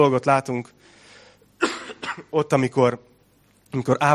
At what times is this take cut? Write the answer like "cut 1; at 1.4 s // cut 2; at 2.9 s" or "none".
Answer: none

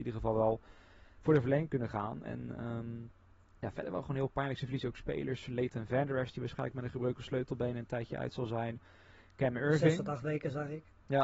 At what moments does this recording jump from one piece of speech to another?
none

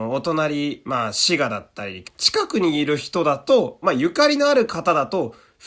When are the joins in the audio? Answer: cut 1; at 2.0 s // cut 2; at 3.8 s

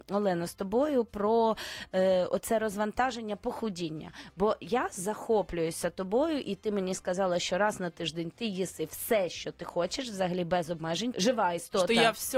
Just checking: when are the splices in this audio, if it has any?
cut 1; at 11.1 s

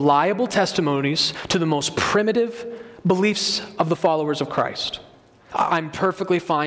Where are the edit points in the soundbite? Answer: cut 1; at 5.5 s

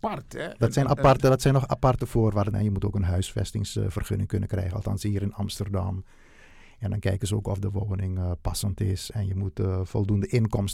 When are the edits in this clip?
cut 1; at 2.5 s

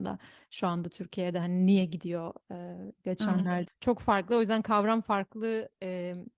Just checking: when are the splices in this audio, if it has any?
cut 1; at 3.7 s

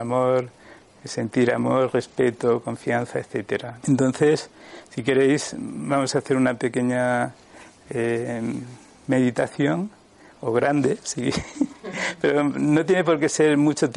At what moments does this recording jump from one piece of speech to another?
cut 1; at 3.8 s

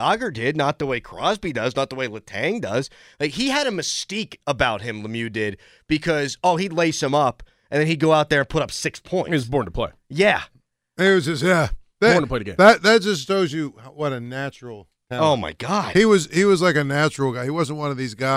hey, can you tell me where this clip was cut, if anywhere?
none

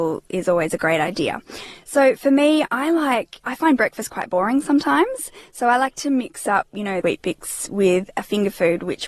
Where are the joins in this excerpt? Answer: cut 1; at 7.0 s

